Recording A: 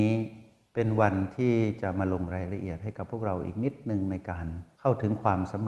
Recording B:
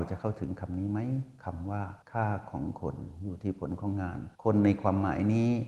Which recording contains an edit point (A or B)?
B